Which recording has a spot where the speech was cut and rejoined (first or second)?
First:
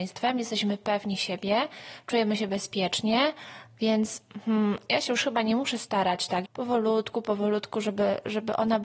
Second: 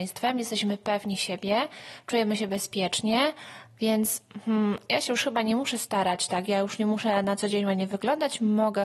first